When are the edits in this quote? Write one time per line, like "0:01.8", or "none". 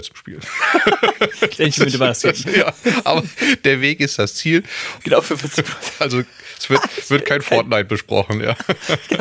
0:05.0